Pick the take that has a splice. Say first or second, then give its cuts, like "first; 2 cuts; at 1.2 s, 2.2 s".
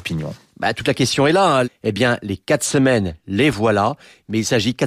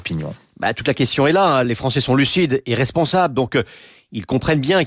first; 1 cut; at 1.6 s